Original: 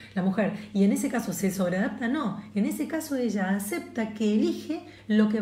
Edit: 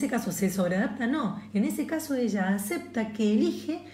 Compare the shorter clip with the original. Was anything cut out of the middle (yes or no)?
no